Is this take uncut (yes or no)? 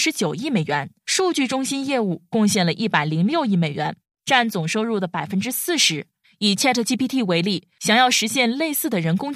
no